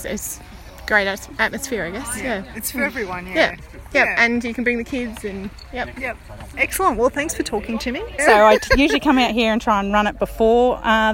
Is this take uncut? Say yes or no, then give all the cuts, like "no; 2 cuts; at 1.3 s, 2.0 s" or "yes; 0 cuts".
no; 2 cuts; at 6.5 s, 8.2 s